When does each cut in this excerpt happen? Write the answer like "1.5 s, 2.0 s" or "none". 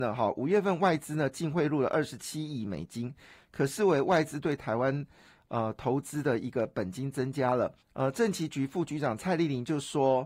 7.8 s